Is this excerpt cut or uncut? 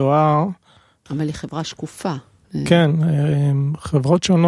cut